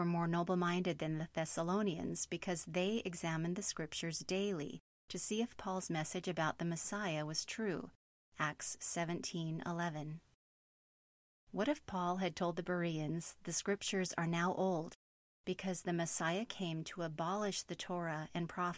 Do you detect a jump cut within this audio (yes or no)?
no